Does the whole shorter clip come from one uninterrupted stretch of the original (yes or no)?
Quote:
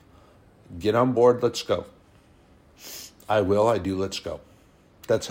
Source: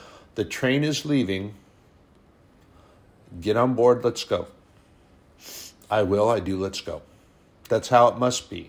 yes